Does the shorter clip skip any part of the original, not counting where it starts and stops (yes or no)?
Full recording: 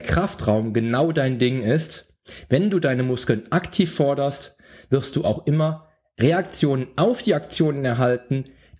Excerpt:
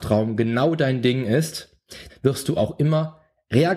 yes